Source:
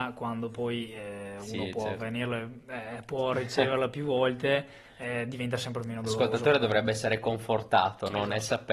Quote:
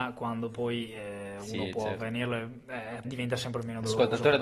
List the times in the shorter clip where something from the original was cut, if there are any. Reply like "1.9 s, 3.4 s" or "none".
3.0 s